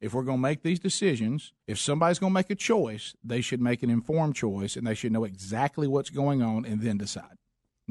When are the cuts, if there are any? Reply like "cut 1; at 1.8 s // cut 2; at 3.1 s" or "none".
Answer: cut 1; at 1.6 s

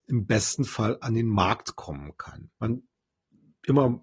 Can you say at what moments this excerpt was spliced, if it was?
cut 1; at 2.5 s

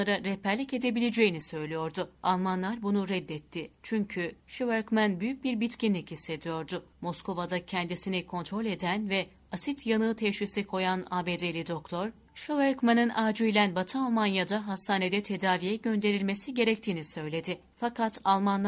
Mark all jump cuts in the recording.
cut 1; at 3.7 s // cut 2; at 6.9 s

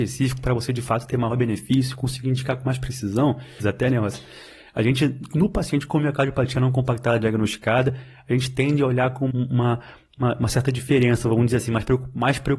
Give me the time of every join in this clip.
cut 1; at 3.6 s // cut 2; at 9.3 s

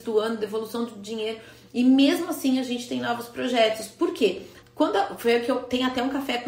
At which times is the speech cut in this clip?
cut 1; at 1.7 s // cut 2; at 4.6 s

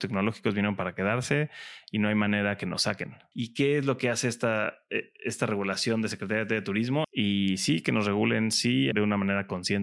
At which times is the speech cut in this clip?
cut 1; at 3.3 s // cut 2; at 7.0 s // cut 3; at 8.9 s

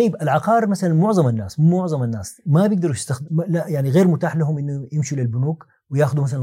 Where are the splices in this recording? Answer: cut 1; at 3.3 s

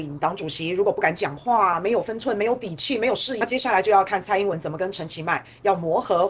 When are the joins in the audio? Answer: cut 1; at 3.4 s

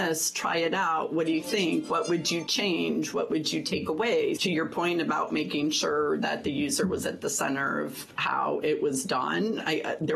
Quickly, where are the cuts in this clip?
cut 1; at 3.1 s // cut 2; at 4.4 s

